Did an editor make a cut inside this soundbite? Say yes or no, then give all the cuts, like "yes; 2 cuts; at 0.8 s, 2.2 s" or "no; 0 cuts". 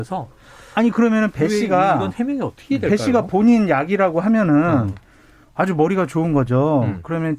no; 0 cuts